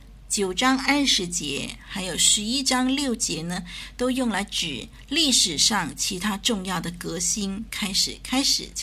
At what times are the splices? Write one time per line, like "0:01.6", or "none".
0:07.7